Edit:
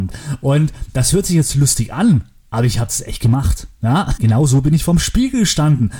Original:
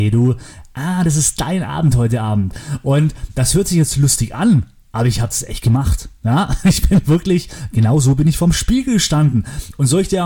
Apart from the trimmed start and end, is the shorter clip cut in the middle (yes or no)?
yes